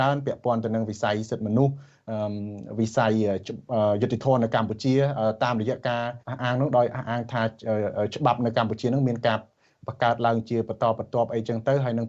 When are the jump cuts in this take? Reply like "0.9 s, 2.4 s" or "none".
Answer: 6.2 s